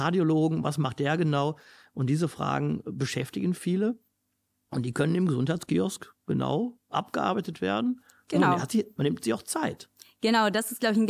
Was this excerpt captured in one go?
yes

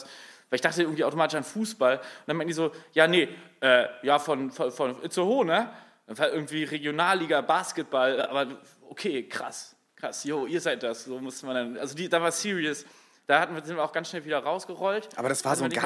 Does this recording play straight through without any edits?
yes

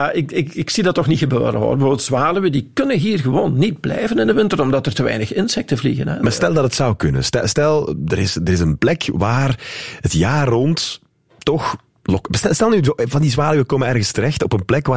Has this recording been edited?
no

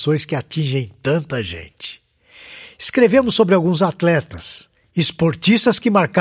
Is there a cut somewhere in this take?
no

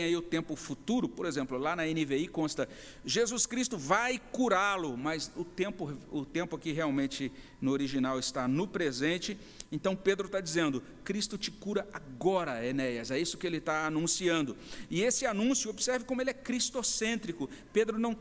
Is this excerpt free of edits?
yes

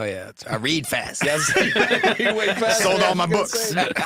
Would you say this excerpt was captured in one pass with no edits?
yes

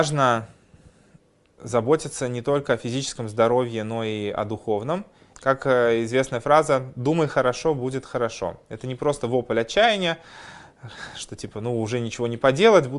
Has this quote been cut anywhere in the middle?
yes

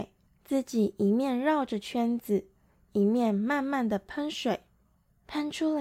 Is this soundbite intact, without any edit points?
yes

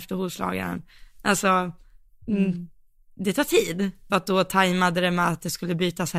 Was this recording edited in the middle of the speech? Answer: yes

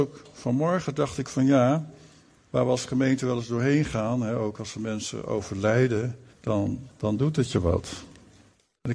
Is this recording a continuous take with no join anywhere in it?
no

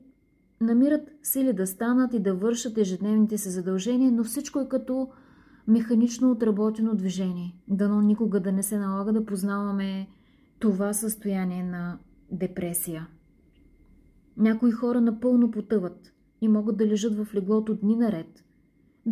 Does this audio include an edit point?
yes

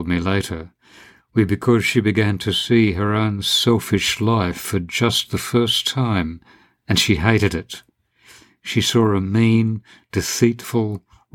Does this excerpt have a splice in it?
no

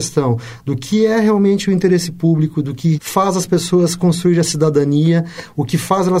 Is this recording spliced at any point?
yes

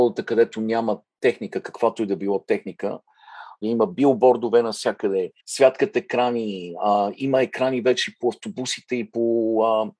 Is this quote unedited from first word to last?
no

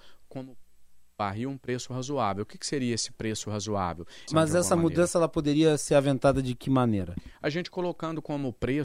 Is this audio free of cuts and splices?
no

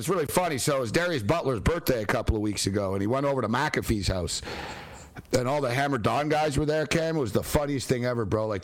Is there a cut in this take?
no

